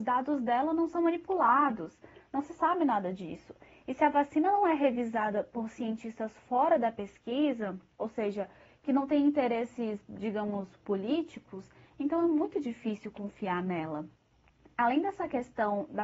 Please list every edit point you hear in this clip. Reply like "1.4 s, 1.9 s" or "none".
none

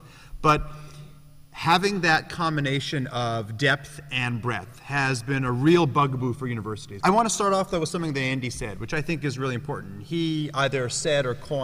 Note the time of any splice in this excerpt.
7.0 s

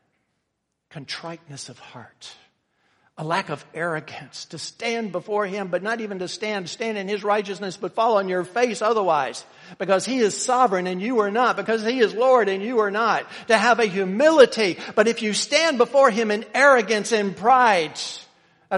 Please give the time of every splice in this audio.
none

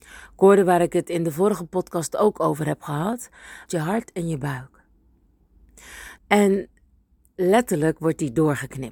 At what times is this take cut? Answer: 3.7 s, 6.2 s

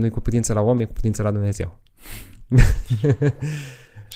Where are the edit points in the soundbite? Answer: none

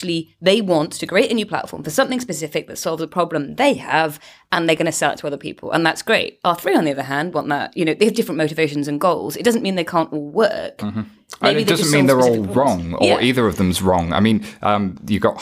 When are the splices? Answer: none

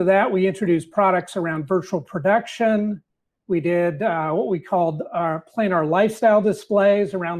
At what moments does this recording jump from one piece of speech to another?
none

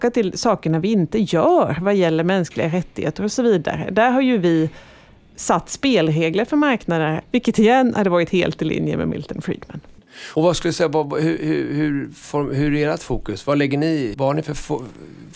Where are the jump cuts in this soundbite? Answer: 7.2 s, 14.1 s

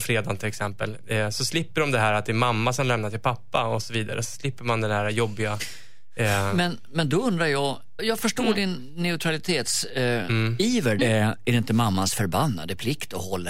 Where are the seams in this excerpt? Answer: 8.0 s, 11.0 s

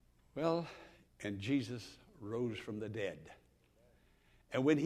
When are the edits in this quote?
1.1 s

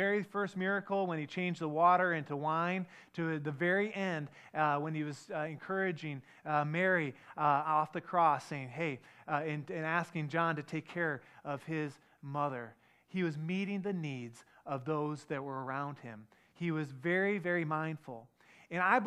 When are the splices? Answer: none

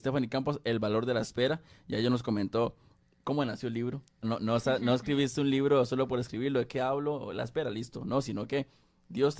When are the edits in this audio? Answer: 4.2 s

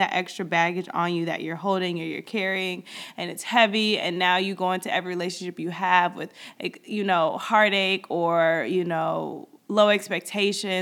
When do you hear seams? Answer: none

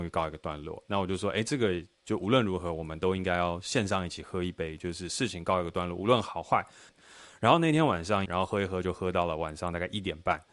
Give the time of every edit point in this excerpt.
6.9 s, 8.3 s

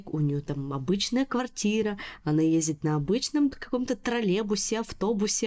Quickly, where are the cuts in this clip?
none

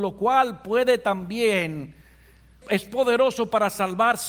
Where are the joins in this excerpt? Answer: 2.6 s

